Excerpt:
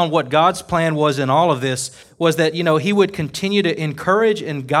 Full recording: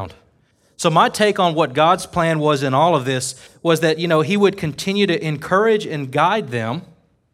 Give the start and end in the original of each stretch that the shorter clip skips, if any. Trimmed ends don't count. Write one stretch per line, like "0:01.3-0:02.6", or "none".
none

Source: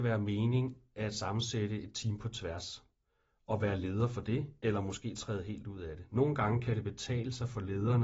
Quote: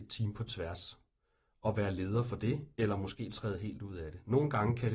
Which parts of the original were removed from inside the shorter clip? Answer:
none

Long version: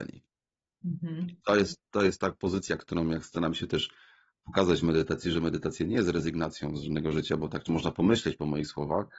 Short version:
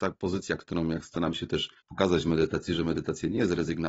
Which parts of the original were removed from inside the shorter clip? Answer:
0:04.0-0:04.4

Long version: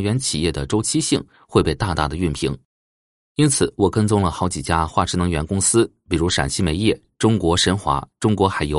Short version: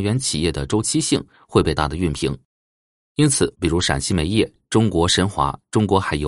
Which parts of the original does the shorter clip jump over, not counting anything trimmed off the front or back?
0:01.8-0:02.0
0:03.7-0:06.0

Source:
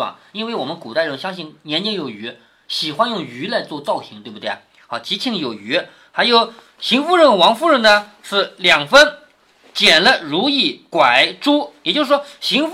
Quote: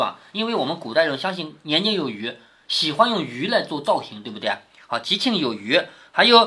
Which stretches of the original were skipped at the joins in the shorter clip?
none

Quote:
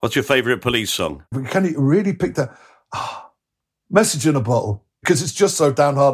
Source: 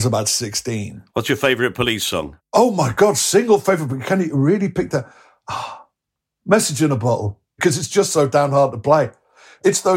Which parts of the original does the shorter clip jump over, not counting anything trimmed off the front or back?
0:02.5-0:03.9

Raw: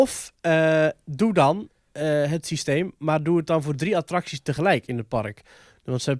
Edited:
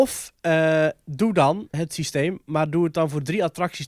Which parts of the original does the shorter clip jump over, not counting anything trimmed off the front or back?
0:01.7-0:02.3

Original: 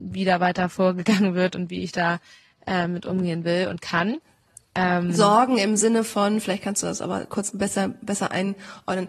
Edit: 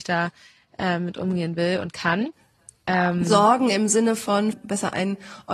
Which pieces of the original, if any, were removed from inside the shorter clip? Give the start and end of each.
0:06.4-0:07.9

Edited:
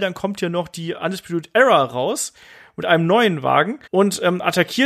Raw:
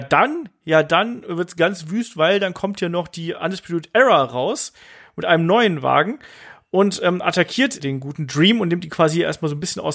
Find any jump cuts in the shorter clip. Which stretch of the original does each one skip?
0:06.3-0:06.7

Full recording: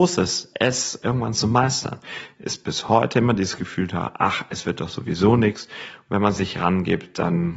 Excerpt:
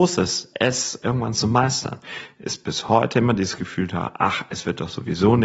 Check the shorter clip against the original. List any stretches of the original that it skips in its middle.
none

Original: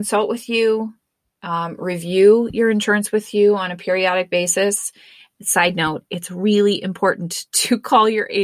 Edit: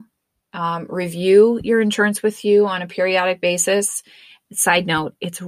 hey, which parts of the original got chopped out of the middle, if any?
none

